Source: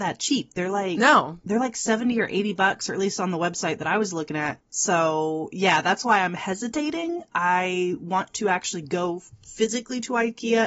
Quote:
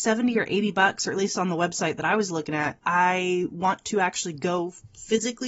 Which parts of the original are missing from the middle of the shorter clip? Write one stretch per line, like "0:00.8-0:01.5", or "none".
0:04.6-0:07.3